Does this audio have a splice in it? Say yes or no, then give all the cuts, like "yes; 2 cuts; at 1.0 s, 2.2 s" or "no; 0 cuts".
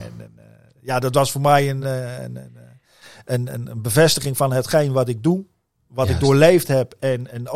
no; 0 cuts